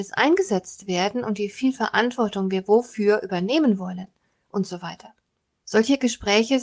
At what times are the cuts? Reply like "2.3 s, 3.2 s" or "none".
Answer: 5.6 s